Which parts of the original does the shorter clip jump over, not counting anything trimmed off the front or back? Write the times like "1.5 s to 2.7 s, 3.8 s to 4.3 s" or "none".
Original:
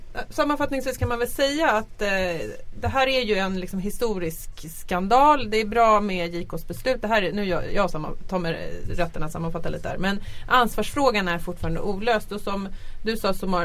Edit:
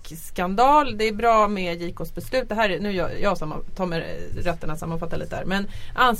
none